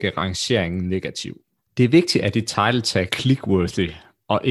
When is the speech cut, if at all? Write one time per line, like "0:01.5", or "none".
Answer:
0:01.6
0:03.1